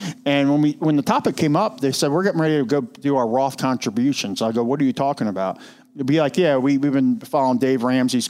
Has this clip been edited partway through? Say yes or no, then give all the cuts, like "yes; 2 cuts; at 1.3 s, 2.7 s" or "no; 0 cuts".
no; 0 cuts